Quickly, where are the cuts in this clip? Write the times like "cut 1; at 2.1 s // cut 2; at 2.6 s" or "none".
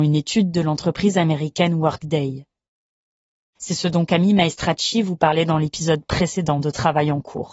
cut 1; at 3.5 s